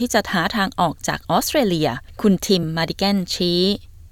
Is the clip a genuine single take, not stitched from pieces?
yes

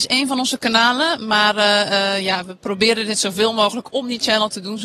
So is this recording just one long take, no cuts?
yes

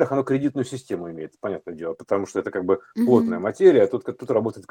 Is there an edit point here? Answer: no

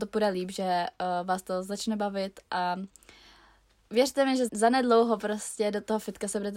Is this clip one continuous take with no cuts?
no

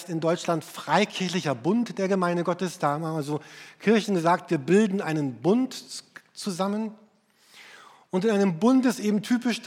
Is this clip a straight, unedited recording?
yes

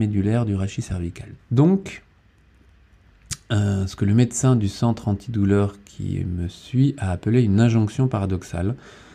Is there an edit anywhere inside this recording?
yes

